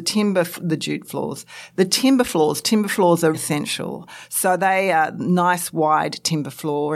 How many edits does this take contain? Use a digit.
1